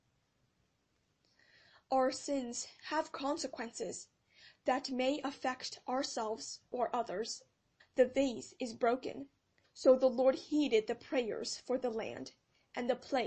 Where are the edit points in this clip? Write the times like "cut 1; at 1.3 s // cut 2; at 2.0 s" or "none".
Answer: cut 1; at 7.8 s // cut 2; at 9.6 s